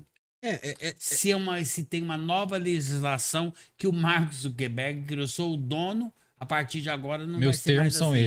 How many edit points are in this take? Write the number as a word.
zero